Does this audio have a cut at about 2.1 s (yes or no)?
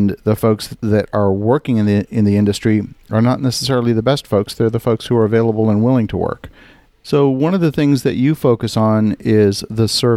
no